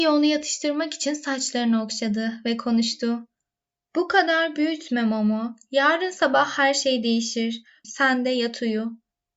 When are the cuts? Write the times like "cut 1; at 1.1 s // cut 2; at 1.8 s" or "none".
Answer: cut 1; at 7.8 s